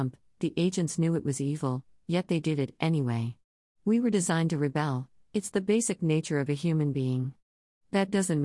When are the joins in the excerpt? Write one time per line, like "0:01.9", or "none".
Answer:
0:03.7